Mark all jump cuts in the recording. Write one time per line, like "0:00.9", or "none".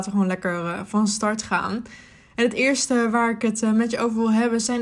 none